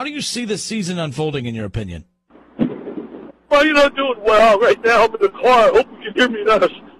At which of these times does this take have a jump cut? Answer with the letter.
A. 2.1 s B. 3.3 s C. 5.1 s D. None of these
B